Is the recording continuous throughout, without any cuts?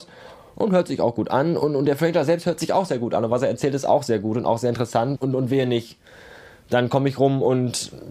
no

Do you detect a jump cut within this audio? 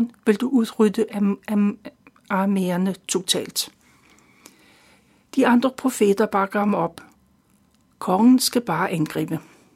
no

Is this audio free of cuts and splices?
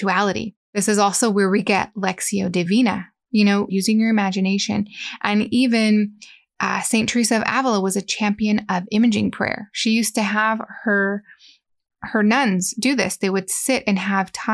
no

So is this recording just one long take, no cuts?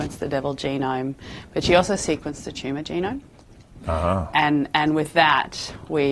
yes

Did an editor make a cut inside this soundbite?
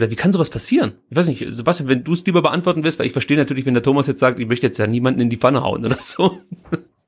no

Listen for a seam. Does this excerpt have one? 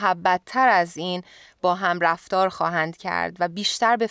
no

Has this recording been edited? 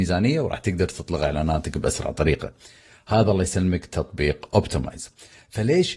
no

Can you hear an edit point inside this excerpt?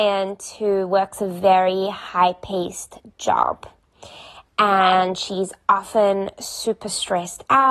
no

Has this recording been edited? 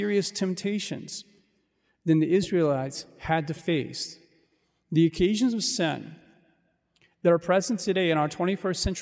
no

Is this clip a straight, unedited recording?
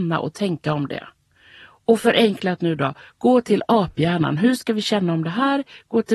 yes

